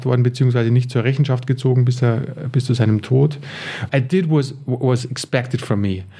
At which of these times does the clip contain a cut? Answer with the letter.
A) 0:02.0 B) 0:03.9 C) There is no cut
B